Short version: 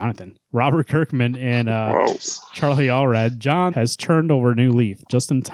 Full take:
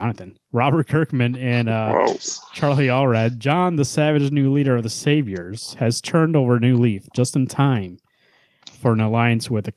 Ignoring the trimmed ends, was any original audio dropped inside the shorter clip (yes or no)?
yes